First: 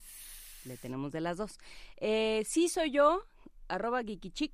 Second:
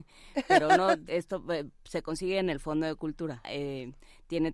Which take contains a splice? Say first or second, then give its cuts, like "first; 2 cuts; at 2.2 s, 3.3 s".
second; 2 cuts; at 1.1 s, 3.4 s